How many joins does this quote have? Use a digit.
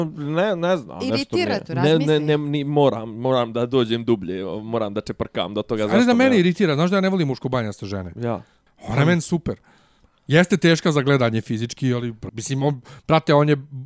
3